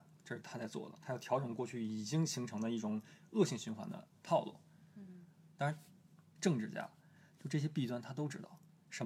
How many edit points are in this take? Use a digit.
1